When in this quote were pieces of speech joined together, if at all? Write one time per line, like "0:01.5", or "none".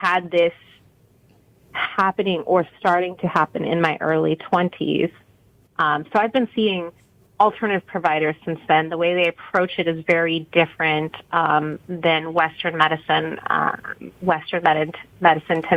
none